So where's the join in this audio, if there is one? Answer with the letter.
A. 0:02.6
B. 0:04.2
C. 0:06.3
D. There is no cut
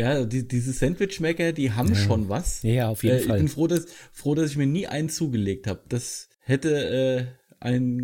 C